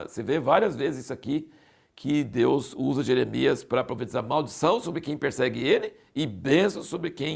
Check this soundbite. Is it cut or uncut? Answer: uncut